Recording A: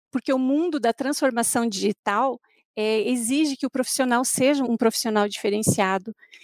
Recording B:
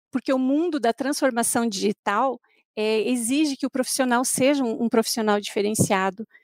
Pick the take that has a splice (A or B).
A